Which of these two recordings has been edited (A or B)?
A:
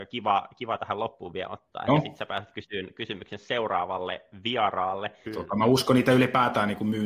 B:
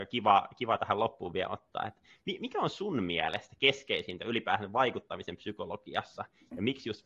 A